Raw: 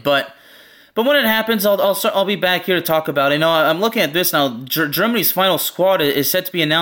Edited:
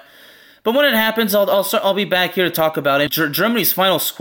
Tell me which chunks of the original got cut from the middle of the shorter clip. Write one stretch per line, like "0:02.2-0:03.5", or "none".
0:03.4-0:04.7